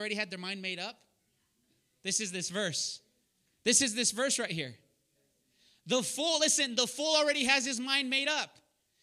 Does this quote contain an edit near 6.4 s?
no; 0 cuts

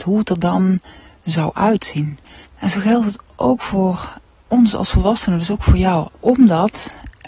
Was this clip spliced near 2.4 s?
yes; 2 cuts; at 2.4 s, 6.0 s

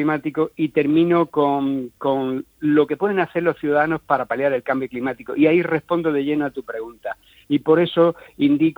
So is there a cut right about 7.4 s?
yes; 1 cut; at 7.4 s

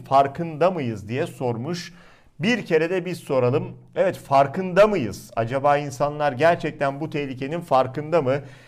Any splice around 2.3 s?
no; 0 cuts

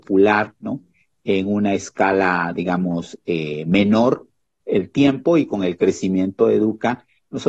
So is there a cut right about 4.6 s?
yes; 1 cut; at 4.6 s

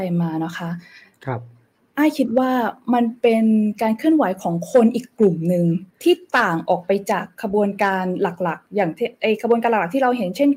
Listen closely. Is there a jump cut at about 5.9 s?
yes; 1 cut; at 5.9 s

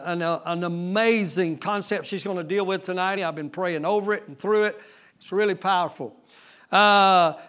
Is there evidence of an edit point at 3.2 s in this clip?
yes; 1 cut; at 3.2 s

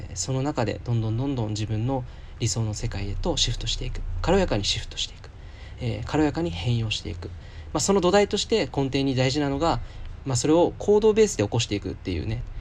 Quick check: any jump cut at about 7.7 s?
no; 1 cut; at 10.2 s

